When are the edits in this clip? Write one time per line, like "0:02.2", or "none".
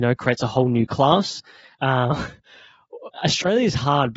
0:01.7
0:03.1